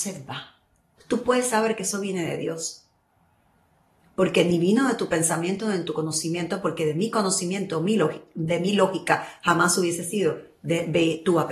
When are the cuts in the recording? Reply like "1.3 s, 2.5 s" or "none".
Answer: 1.0 s